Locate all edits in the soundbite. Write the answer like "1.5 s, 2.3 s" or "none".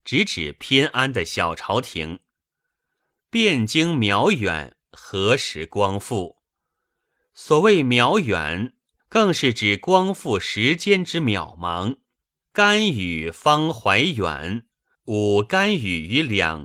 9.0 s, 12.4 s, 14.9 s